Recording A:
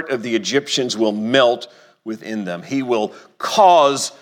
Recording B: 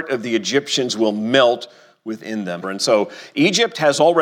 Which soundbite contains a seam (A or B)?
B